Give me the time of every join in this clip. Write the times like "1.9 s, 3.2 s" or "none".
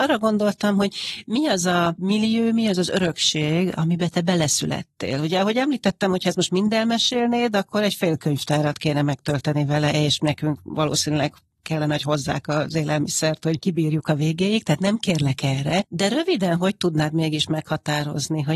none